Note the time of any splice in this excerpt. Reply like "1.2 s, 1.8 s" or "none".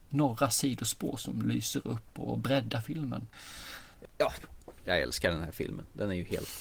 4.7 s